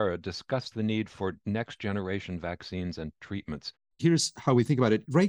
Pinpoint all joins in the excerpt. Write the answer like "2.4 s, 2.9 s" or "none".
3.9 s